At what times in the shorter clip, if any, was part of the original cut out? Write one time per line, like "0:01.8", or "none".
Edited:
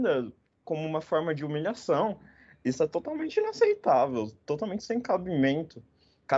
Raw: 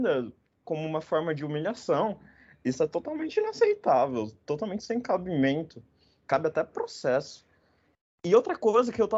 none